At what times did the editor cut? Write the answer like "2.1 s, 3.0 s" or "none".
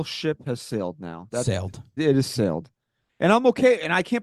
2.0 s